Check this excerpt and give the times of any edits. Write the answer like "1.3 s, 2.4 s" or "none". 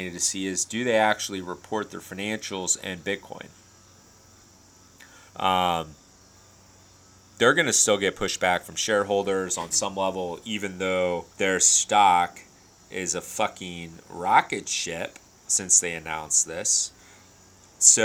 5.3 s, 11.3 s

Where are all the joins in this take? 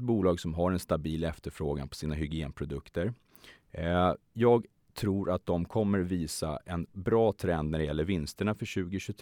none

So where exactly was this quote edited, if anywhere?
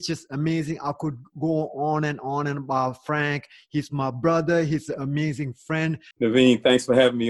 6.1 s

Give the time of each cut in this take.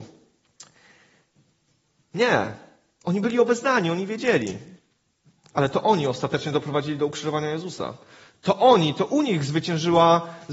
2.0 s

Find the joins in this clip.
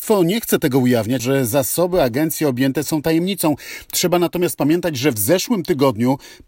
1.2 s

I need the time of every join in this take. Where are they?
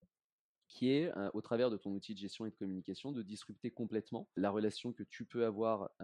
4.4 s

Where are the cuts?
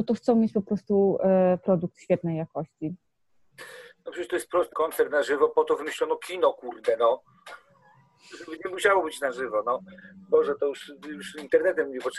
4.7 s

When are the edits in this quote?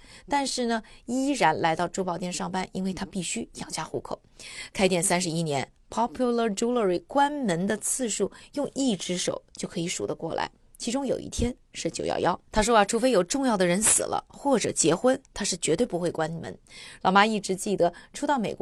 12.4 s, 15.2 s, 17.0 s

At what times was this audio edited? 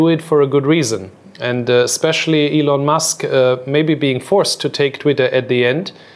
none

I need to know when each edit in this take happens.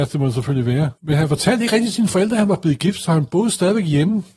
1.0 s

